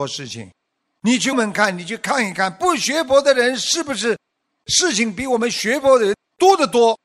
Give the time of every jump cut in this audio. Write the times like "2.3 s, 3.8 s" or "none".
1.3 s